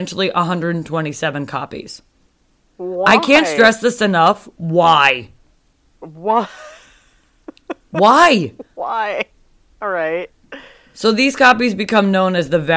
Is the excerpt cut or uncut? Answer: cut